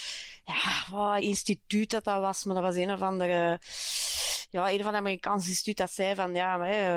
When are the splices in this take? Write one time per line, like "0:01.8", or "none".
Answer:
0:01.2